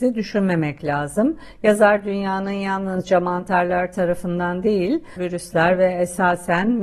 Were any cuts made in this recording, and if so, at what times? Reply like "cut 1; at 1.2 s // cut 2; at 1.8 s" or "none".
cut 1; at 5.2 s